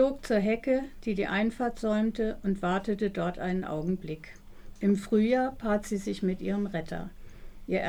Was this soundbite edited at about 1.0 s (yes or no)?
no